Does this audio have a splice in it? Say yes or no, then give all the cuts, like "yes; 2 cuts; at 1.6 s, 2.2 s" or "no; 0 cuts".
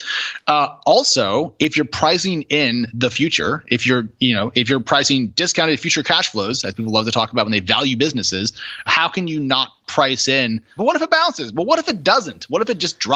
yes; 2 cuts; at 8.9 s, 10.8 s